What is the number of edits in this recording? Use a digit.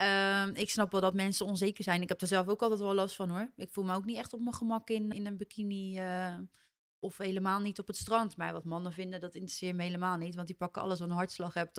1